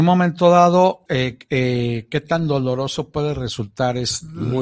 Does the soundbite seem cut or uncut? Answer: cut